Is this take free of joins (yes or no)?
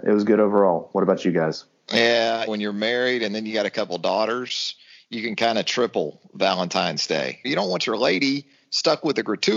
no